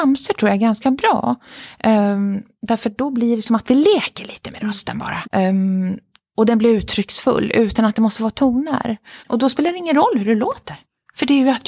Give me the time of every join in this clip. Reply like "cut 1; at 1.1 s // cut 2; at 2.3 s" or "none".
cut 1; at 5.2 s // cut 2; at 9.2 s